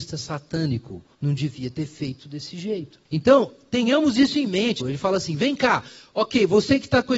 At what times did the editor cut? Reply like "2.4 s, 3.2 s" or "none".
1.1 s, 3.1 s, 4.8 s